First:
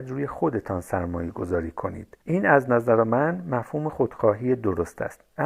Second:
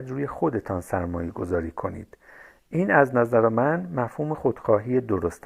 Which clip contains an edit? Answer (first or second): first